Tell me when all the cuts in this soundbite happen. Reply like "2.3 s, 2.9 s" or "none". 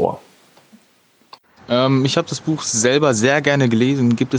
1.6 s